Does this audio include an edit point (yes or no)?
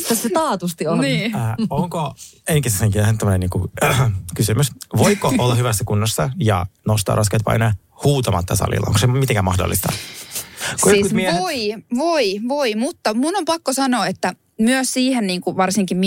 no